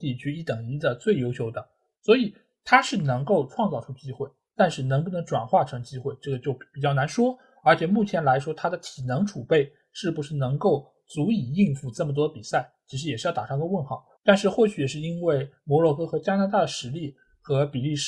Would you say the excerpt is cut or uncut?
cut